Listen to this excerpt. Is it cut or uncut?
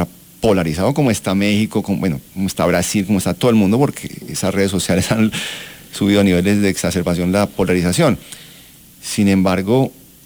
uncut